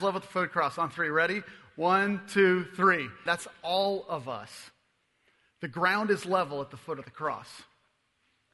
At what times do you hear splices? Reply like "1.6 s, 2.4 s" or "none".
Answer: 3.3 s